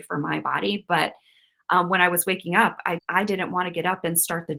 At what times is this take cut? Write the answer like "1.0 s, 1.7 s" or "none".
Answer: 3.0 s